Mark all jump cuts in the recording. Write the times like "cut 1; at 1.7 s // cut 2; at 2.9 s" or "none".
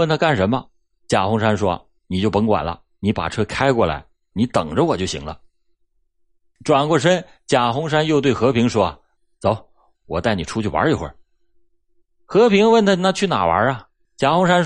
cut 1; at 4.3 s // cut 2; at 9.9 s